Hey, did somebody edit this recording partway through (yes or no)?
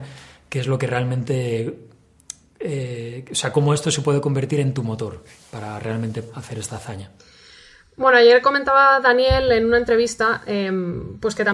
no